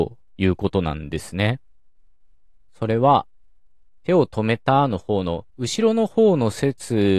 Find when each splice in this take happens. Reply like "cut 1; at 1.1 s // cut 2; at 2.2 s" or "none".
cut 1; at 2.7 s // cut 2; at 5.5 s

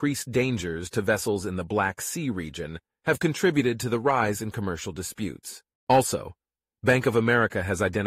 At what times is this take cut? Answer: cut 1; at 5.7 s

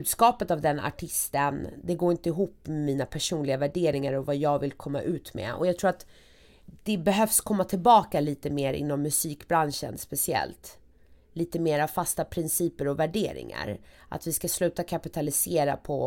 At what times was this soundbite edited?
none

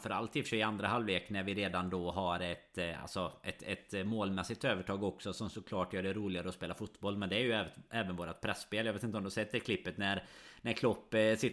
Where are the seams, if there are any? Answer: none

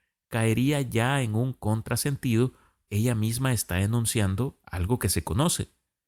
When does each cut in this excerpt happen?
cut 1; at 2.9 s

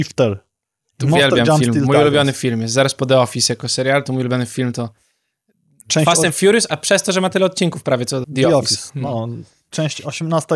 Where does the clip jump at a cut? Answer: cut 1; at 8.2 s

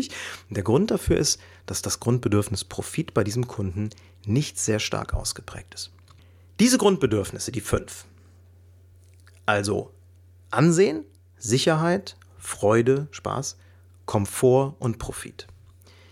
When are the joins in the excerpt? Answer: none

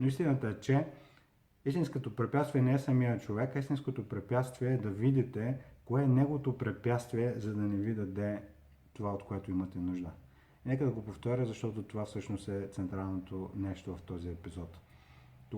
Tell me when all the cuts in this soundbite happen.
none

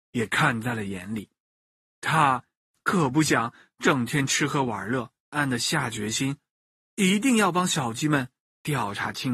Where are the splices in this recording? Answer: cut 1; at 5.3 s

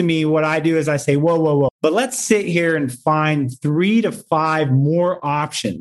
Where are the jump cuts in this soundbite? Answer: cut 1; at 1.7 s

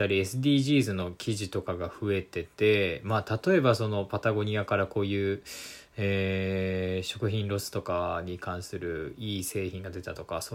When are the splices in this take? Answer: none

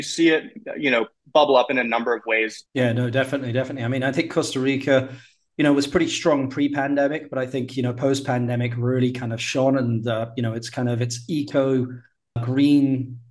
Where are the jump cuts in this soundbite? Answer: cut 1; at 2.7 s // cut 2; at 12.4 s

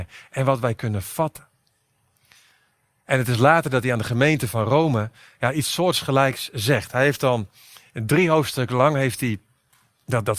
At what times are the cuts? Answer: none

